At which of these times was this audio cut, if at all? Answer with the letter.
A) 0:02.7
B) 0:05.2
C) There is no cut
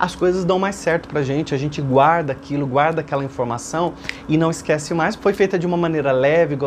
B